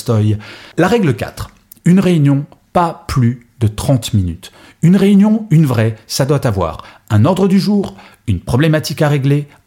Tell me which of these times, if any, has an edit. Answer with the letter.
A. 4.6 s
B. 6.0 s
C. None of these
C